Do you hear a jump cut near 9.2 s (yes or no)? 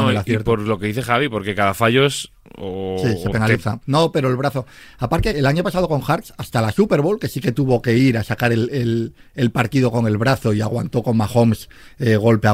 no